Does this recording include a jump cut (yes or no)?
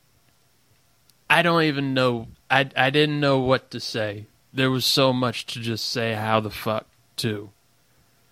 no